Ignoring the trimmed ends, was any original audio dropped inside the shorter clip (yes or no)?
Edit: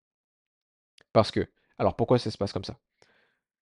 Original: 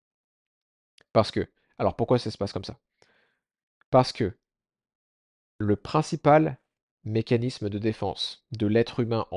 no